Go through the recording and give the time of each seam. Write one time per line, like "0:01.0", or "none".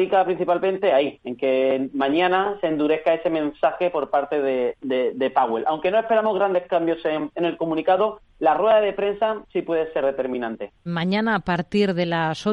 0:10.9

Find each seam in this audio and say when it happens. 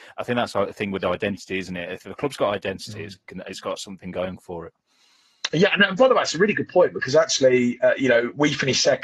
none

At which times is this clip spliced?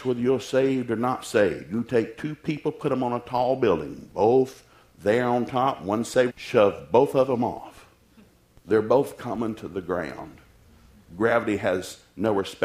0:06.3

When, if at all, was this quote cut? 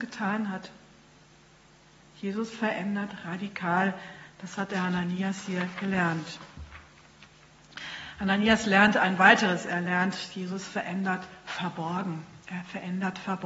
none

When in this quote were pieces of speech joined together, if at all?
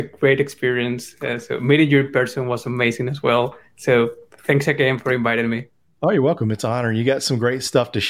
none

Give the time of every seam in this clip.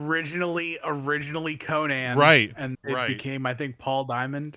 0:02.7

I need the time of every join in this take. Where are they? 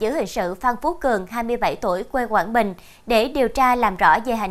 none

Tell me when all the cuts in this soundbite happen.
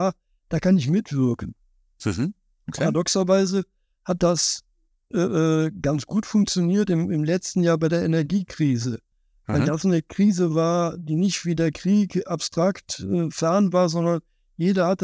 none

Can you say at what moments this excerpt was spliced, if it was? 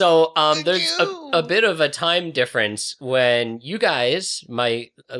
none

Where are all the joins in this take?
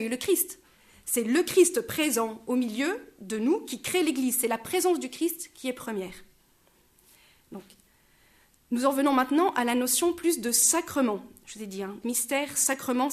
0:12.0

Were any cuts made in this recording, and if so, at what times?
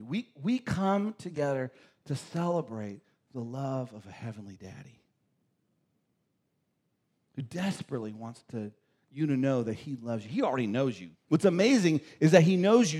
0:11.1

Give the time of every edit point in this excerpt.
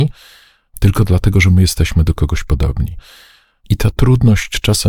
0:03.5

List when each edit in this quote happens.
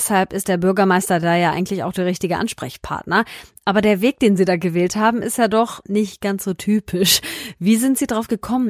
0:05.8

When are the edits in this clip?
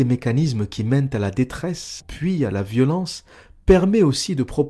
0:02.0

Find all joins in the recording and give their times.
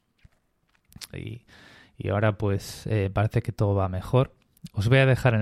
0:01.1

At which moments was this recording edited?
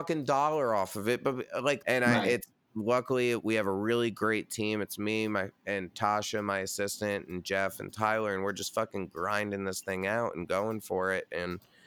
0:01.8

